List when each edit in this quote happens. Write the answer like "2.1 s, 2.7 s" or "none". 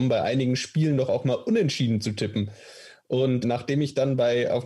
3.4 s